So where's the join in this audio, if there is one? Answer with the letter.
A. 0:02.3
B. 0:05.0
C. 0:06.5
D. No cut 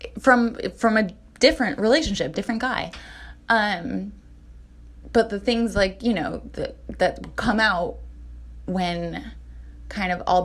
A